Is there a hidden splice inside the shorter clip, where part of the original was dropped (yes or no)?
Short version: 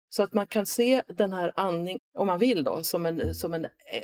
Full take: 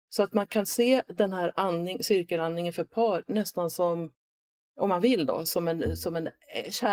yes